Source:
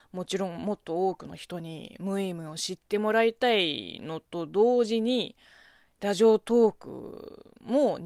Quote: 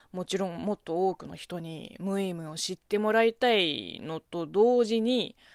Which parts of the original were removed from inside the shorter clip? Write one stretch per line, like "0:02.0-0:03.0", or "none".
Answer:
none